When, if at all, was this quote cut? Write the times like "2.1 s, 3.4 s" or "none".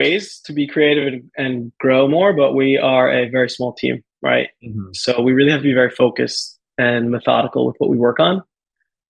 none